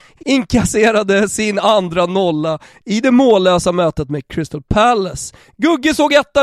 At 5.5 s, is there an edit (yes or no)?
no